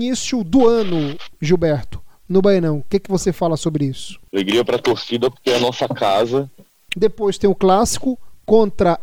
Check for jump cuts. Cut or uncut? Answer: cut